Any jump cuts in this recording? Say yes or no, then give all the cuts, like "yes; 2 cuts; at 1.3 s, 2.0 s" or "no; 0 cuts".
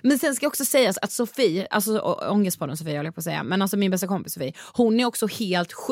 no; 0 cuts